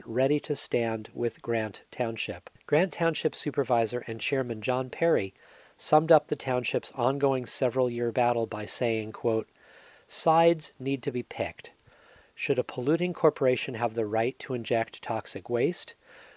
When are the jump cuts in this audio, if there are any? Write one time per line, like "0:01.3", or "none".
0:02.6

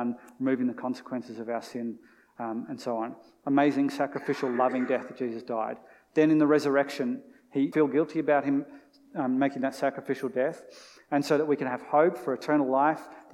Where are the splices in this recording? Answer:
0:07.7

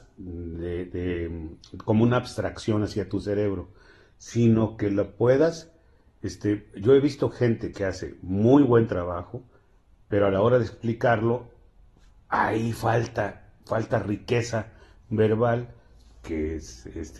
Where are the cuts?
none

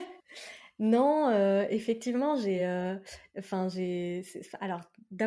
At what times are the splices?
none

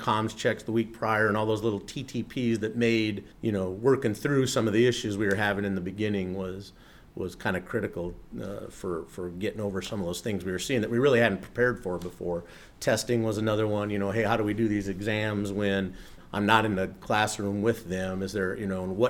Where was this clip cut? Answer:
0:03.3

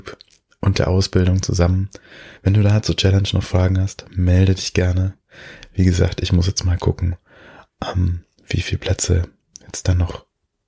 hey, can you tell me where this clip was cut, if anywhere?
0:02.4

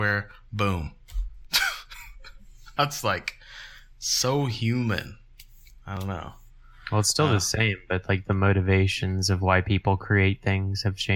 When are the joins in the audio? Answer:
0:02.8

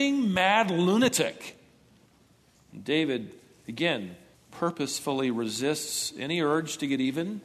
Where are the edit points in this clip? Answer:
0:02.5

